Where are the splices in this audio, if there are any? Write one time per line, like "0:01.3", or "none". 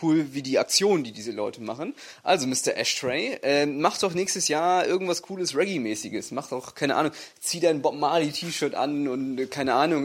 none